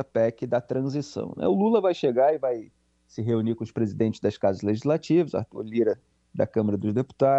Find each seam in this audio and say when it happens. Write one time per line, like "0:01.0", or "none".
none